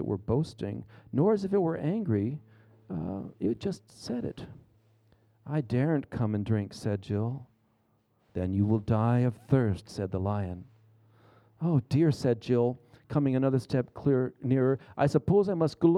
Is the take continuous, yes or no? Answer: yes